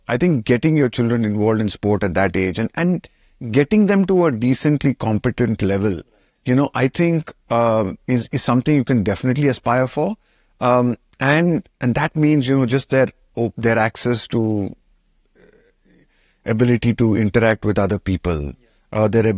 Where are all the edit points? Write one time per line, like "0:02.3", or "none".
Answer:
none